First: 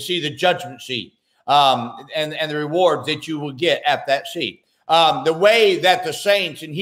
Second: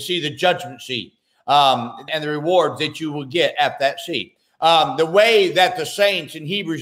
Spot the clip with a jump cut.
second; 1 cut; at 2.1 s

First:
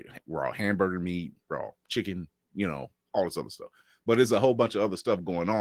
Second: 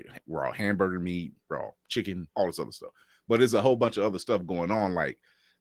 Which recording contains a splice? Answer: second; 1 cut; at 2.3 s

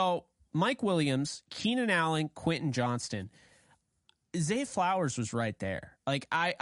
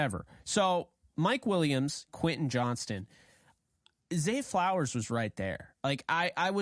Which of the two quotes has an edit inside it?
second; 1 cut; at 2.1 s

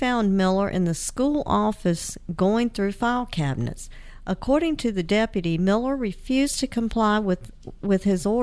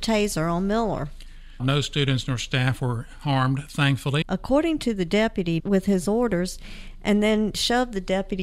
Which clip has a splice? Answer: second; 3 cuts; at 1.6 s, 4.2 s, 5.6 s

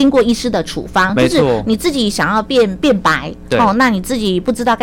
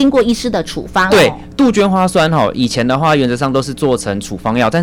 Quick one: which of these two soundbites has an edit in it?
second; 1 cut; at 1.1 s

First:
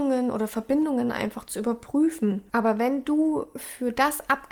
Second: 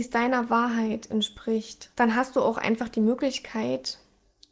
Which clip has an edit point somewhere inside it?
first; 1 cut; at 2.5 s

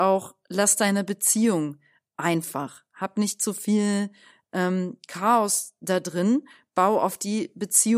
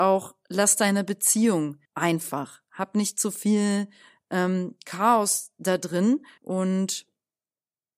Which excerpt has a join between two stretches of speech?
second; 2 cuts; at 1.9 s, 6.4 s

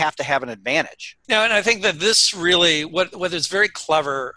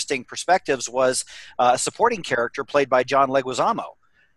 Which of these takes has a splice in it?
first; 1 cut; at 1.2 s

